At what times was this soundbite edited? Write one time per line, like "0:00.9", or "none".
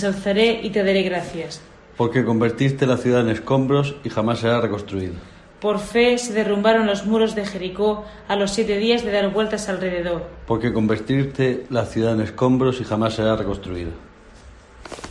none